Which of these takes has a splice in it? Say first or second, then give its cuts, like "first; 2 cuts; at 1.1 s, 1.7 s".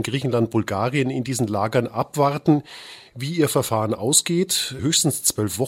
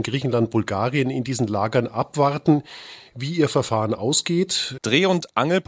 second; 1 cut; at 4.8 s